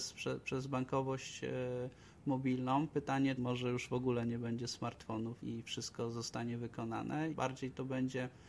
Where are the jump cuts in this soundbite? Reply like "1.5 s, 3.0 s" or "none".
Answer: 3.4 s, 5.4 s, 7.3 s